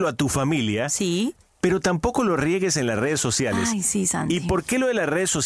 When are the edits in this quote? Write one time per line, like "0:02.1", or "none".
none